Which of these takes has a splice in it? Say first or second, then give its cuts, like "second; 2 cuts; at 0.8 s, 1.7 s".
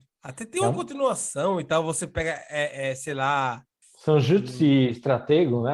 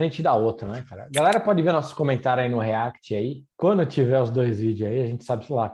second; 1 cut; at 3.5 s